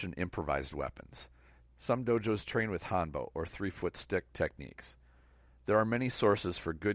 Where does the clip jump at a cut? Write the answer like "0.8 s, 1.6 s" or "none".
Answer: 1.6 s